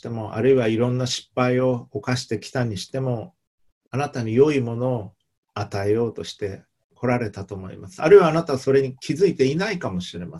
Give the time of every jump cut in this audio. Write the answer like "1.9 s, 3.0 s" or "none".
none